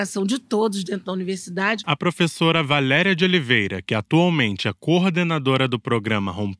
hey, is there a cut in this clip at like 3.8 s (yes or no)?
no